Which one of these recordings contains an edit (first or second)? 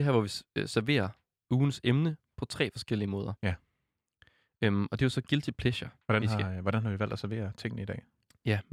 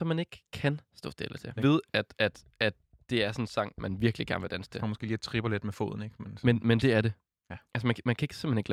second